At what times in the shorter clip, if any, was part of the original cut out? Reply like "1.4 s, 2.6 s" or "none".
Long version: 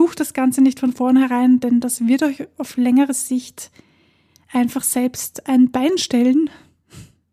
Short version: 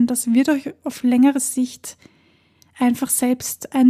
none